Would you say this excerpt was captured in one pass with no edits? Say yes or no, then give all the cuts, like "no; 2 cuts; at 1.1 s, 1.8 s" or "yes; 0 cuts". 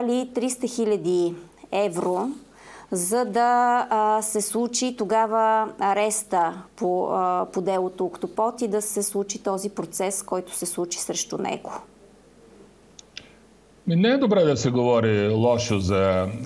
yes; 0 cuts